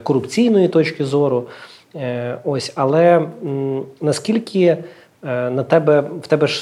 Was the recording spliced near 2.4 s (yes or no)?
no